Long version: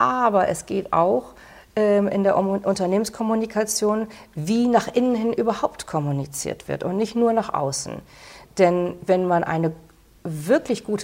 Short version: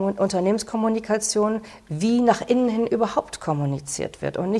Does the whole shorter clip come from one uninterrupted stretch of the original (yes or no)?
yes